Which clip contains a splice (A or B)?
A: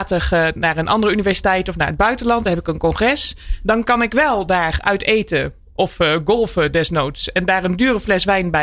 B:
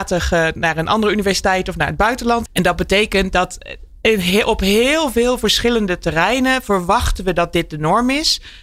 B